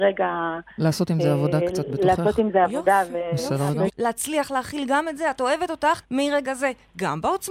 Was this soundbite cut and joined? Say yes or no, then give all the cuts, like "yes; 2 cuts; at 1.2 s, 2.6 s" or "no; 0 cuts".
yes; 2 cuts; at 3.9 s, 6.0 s